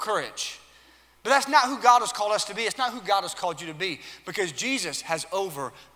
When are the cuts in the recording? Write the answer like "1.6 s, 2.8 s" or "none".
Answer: none